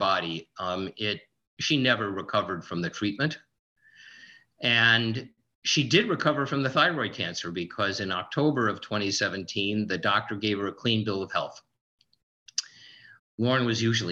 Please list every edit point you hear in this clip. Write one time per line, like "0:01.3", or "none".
0:13.2